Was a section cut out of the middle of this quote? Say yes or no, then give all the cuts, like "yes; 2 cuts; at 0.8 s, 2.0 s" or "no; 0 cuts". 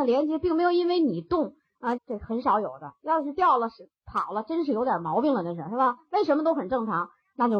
yes; 1 cut; at 2.0 s